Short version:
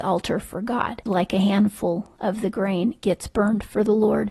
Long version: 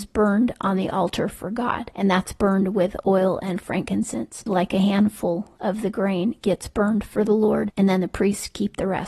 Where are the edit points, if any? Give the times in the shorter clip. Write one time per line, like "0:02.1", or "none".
0:01.0